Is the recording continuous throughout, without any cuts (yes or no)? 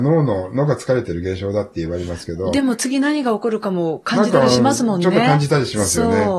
yes